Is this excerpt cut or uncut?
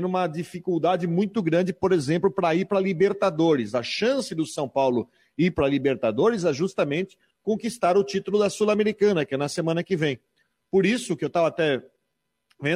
uncut